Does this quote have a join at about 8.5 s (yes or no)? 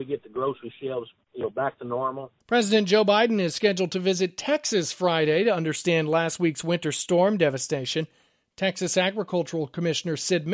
no